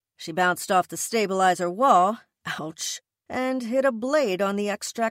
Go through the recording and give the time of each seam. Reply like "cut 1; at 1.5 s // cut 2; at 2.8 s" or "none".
none

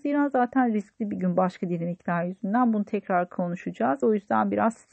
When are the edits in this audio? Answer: cut 1; at 4.0 s

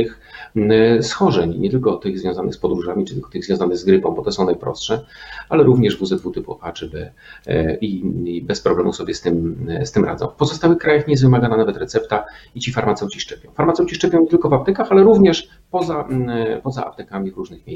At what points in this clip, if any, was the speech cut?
none

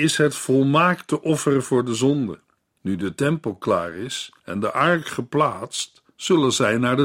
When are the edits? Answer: cut 1; at 2.8 s // cut 2; at 4.4 s

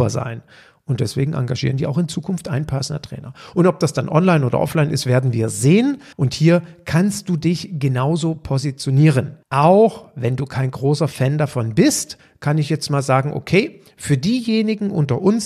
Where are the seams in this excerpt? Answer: cut 1; at 6.1 s // cut 2; at 9.4 s

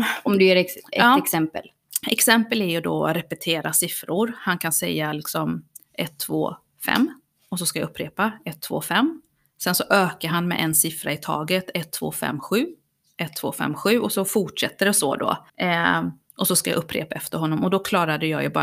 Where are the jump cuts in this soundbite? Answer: cut 1; at 15.5 s

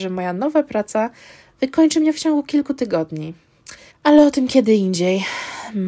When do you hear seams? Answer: cut 1; at 3.9 s

